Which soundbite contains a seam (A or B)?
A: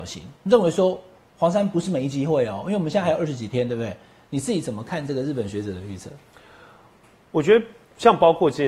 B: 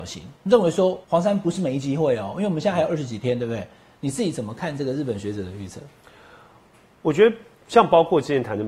B